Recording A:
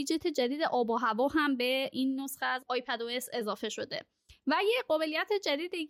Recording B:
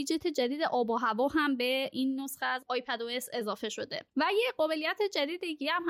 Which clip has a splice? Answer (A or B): B